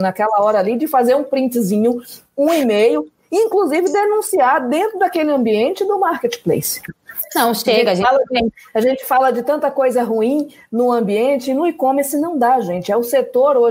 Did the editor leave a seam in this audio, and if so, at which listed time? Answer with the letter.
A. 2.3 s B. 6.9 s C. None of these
B